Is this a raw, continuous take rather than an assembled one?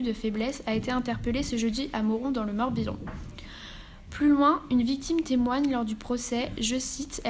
yes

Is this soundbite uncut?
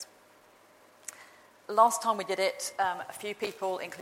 yes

